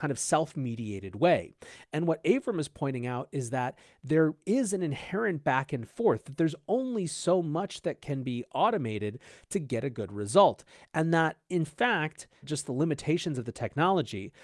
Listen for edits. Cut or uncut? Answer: cut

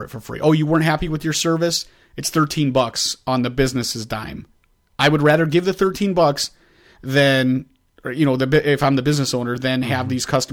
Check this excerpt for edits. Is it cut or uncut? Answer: uncut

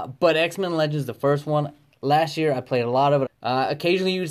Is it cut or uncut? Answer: cut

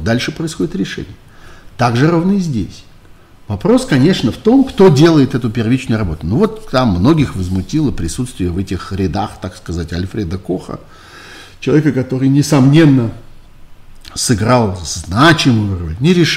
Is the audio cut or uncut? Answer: uncut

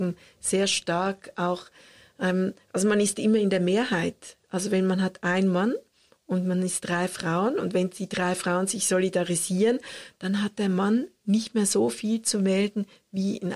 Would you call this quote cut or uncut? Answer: uncut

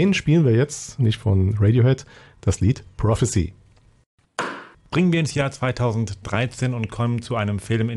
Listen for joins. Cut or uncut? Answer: cut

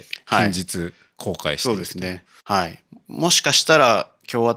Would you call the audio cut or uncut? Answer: cut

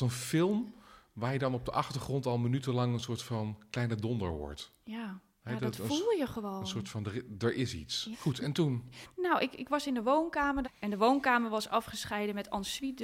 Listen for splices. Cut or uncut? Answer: cut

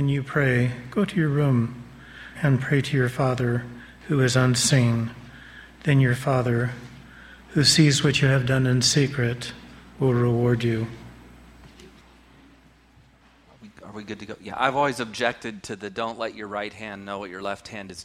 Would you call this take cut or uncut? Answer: cut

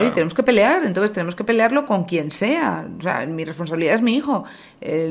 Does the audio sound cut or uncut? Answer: uncut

